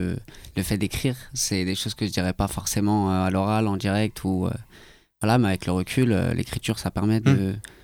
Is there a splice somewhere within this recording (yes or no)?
no